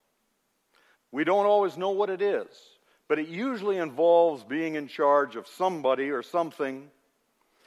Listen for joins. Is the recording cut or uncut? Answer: cut